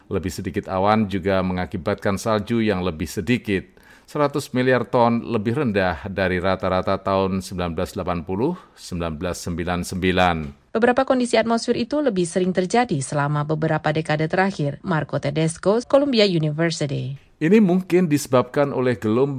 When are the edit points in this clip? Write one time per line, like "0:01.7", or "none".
0:10.7
0:14.8
0:15.8

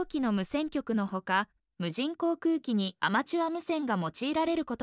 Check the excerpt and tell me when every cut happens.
none

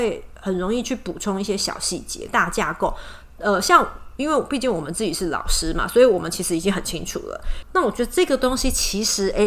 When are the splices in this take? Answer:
0:02.3
0:07.6

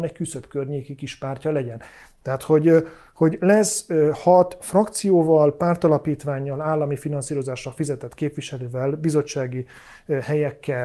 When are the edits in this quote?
0:02.2

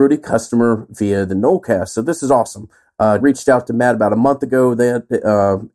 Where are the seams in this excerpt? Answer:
0:03.2

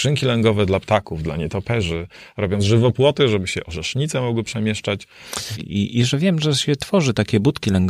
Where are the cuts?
0:05.5

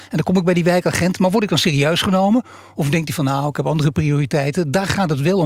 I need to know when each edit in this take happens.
none

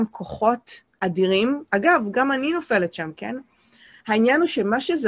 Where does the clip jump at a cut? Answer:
0:04.0

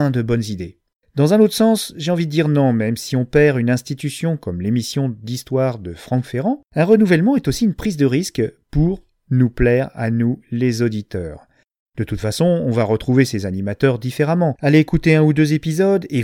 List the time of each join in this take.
0:14.6

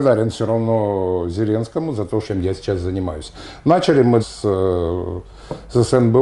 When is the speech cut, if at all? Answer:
0:02.2
0:04.2

